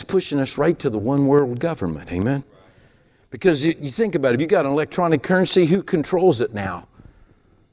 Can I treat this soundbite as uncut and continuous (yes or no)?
yes